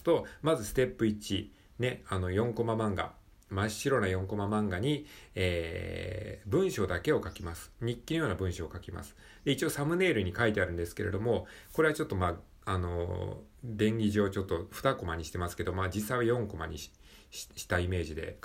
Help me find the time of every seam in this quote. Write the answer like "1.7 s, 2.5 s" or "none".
none